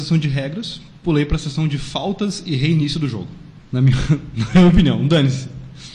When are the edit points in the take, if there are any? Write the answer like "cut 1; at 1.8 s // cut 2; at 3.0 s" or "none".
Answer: cut 1; at 3.6 s